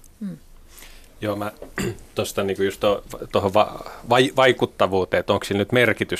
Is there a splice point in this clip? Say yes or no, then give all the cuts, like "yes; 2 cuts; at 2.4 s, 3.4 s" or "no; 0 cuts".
no; 0 cuts